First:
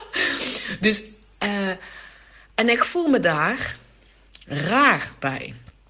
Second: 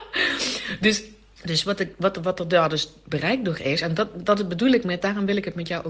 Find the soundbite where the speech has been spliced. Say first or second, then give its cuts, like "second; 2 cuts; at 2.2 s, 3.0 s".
second; 1 cut; at 1.4 s